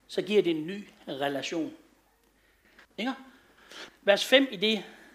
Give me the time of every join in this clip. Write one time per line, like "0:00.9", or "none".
0:02.9
0:03.9